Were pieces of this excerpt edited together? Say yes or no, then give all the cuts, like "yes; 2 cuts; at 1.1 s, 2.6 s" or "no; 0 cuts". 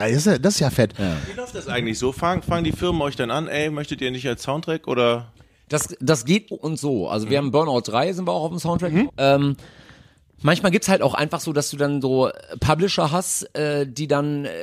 yes; 2 cuts; at 6.5 s, 9.1 s